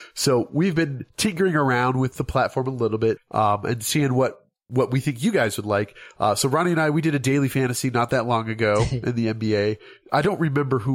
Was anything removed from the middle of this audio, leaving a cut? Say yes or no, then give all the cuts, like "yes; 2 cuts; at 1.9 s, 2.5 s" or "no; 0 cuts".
yes; 1 cut; at 3.2 s